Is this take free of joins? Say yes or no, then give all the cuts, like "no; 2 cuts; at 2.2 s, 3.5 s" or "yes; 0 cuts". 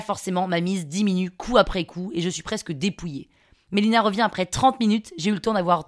yes; 0 cuts